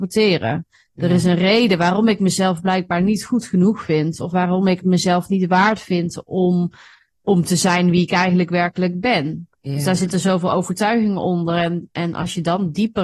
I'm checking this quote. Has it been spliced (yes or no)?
no